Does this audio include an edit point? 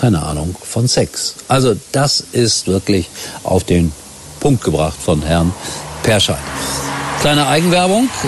no; 0 cuts

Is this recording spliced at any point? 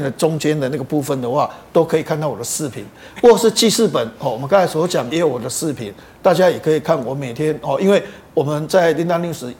yes; 1 cut; at 5.1 s

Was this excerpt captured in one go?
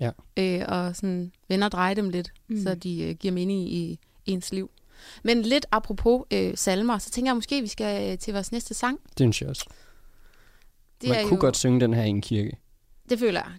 yes; 0 cuts

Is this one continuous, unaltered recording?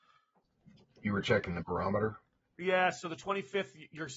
yes; 0 cuts

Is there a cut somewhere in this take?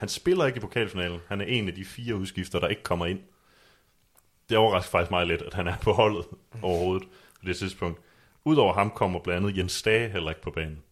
no; 0 cuts

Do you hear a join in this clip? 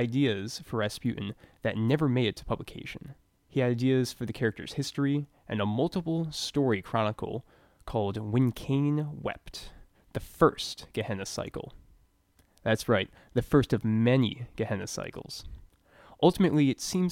no; 0 cuts

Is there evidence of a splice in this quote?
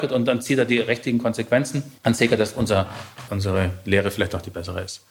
yes; 2 cuts; at 2.0 s, 3.3 s

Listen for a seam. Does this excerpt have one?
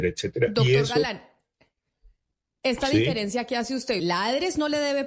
yes; 1 cut; at 4.0 s

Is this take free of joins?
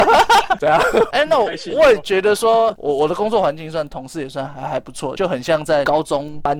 no; 3 cuts; at 1.1 s, 2.8 s, 5.2 s

